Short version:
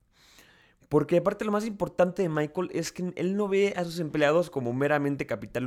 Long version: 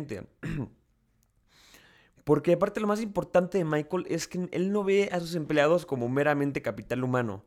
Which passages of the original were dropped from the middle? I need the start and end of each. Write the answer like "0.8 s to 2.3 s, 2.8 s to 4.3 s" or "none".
none